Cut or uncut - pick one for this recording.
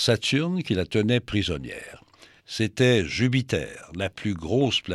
cut